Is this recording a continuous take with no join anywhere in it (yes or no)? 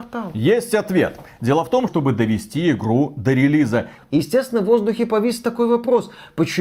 no